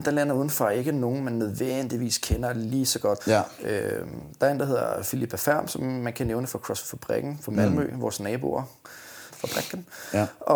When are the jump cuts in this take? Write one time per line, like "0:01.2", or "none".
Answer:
0:03.2
0:09.3